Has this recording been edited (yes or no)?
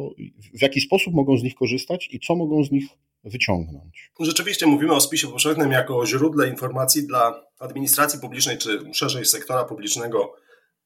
no